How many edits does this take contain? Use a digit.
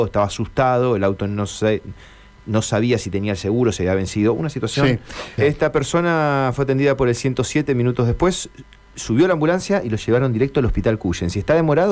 1